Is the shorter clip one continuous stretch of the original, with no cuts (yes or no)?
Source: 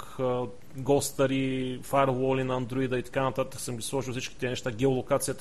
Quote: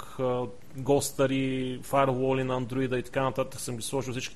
yes